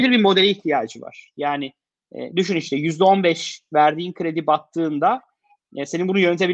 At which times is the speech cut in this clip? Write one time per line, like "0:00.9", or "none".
none